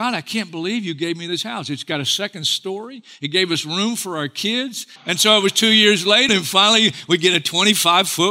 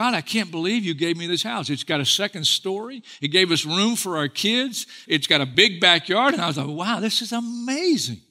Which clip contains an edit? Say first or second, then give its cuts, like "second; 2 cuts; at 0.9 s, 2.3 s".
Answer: first; 2 cuts; at 5.0 s, 6.3 s